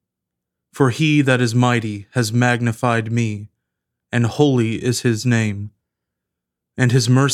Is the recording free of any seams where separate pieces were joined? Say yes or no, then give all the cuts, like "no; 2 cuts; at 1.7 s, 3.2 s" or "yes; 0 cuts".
yes; 0 cuts